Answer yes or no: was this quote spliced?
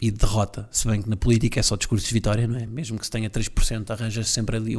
no